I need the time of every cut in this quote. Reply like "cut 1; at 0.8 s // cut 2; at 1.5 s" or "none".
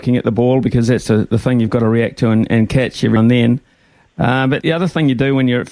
cut 1; at 3.2 s // cut 2; at 4.6 s